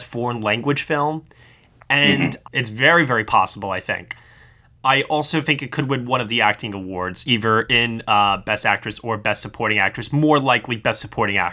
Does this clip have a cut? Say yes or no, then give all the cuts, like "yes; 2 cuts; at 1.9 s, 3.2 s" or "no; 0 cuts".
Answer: yes; 1 cut; at 2.4 s